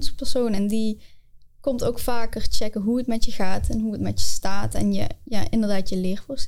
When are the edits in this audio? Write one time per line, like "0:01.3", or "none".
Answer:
none